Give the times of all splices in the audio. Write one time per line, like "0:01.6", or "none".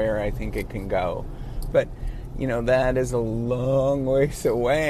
0:01.7